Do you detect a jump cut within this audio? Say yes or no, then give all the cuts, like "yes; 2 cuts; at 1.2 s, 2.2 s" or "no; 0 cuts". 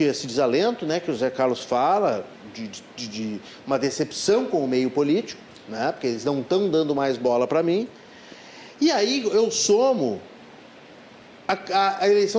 no; 0 cuts